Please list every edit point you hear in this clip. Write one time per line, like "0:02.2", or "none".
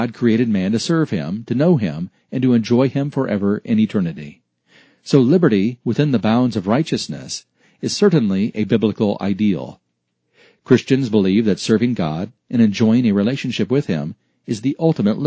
none